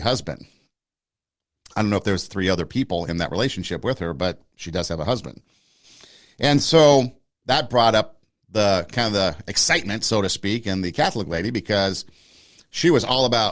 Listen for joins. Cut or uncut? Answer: uncut